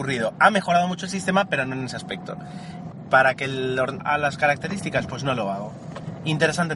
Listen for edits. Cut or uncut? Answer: cut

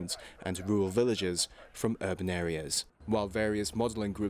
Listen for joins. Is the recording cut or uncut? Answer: cut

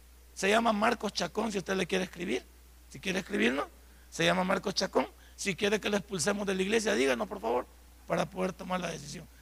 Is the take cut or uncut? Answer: uncut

